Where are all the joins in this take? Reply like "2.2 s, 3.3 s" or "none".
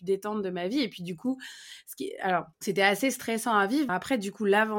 2.5 s, 3.9 s